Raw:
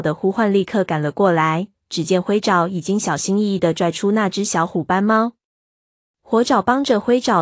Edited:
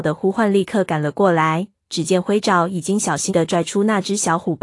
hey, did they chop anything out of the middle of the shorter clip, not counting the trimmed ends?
yes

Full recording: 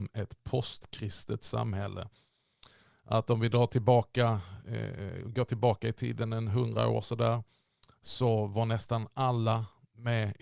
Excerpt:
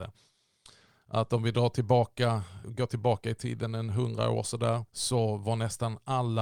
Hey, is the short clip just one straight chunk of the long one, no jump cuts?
no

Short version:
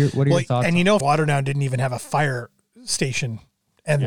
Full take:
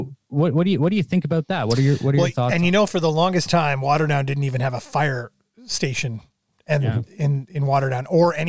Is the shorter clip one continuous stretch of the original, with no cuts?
no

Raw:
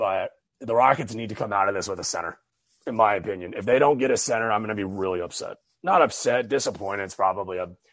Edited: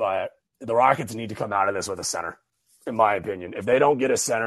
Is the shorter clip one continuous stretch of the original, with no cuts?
yes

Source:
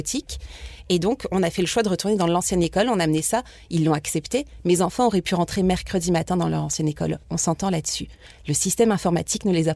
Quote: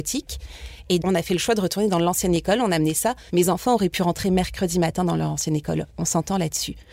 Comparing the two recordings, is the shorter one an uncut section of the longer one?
no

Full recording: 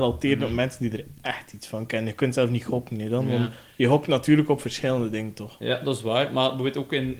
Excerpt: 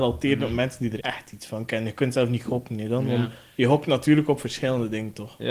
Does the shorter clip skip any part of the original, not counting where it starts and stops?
yes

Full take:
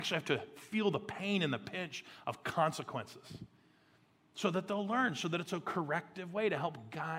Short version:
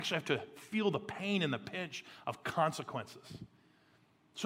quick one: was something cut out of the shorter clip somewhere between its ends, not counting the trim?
no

